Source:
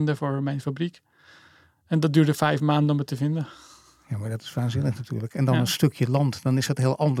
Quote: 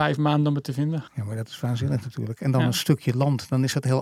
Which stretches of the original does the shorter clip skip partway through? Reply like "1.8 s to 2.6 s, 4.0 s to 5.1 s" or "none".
3.5 s to 4.0 s